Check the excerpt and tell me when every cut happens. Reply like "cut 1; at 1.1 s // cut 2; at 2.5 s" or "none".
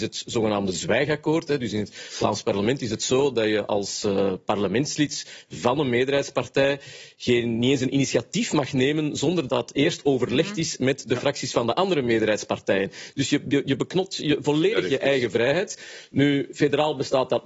cut 1; at 9.5 s

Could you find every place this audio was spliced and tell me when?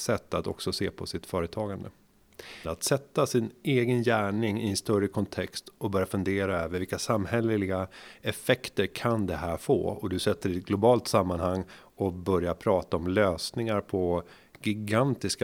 cut 1; at 2.6 s

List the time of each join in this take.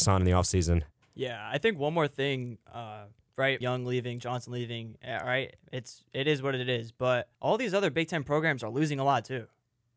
cut 1; at 3.6 s // cut 2; at 7.3 s

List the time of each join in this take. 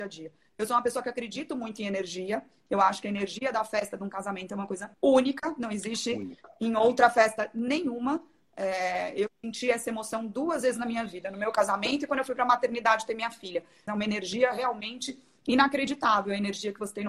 cut 1; at 4.9 s // cut 2; at 13.9 s

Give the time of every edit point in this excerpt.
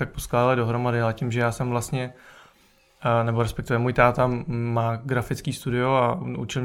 none

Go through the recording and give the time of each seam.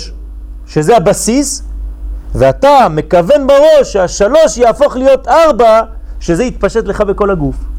none

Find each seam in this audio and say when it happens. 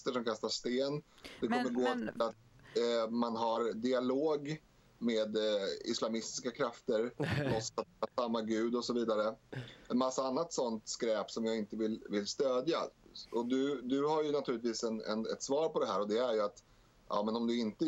none

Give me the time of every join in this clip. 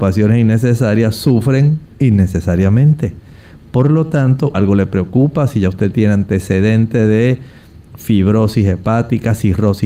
cut 1; at 4.5 s

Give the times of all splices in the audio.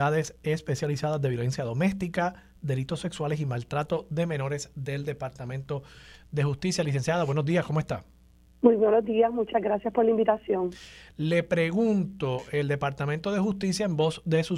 none

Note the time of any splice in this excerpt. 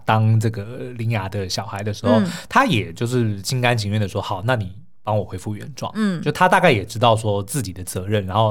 none

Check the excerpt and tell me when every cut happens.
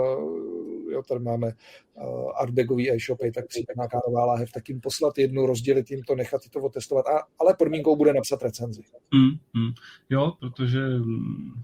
cut 1; at 10.4 s

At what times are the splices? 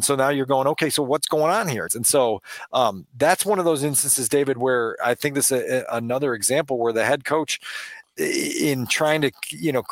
cut 1; at 1.9 s

